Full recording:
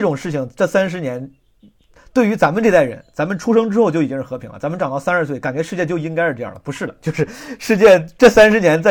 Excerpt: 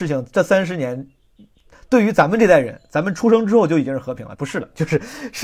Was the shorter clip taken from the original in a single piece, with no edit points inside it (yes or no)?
no